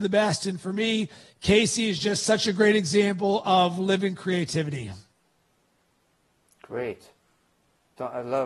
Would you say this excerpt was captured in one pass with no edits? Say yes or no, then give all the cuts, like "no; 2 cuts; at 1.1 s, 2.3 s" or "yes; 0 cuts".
yes; 0 cuts